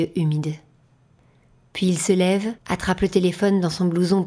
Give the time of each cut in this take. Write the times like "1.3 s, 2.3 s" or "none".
2.6 s

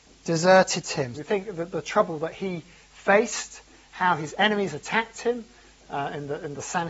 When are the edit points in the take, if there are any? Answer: 1.1 s

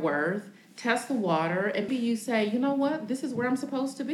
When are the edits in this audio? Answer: 1.9 s

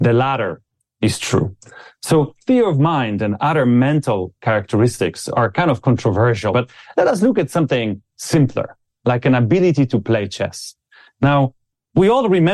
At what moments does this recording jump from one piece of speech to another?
6.5 s

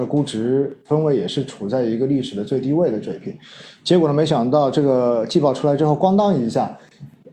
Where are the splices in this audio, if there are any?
none

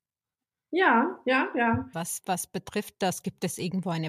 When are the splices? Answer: 1.9 s

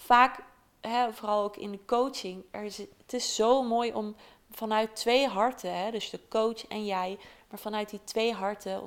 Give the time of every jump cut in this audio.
1.1 s

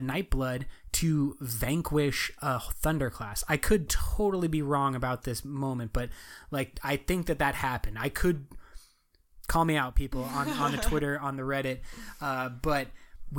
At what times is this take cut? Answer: none

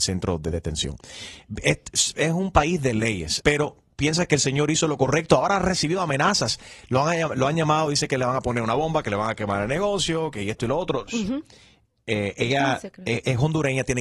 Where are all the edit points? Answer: 3.4 s, 11.1 s

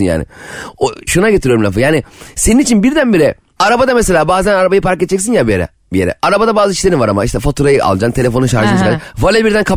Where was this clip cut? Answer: 1.1 s, 3.6 s

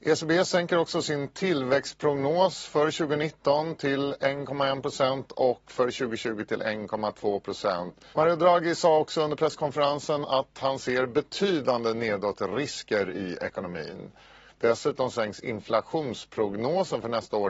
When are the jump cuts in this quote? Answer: 8.1 s, 14.5 s

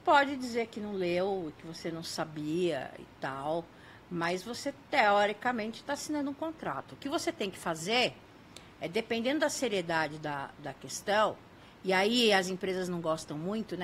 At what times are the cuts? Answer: none

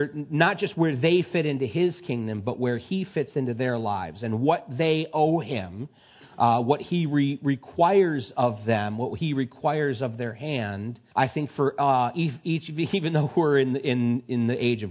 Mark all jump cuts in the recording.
11.1 s

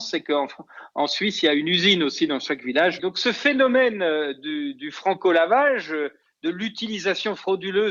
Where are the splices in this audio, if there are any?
3.0 s

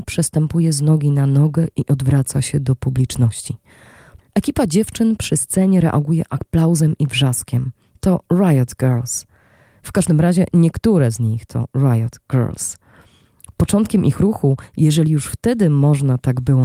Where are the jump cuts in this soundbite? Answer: 4.2 s

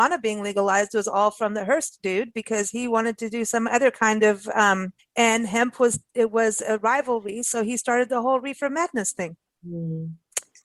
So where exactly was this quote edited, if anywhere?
5.0 s

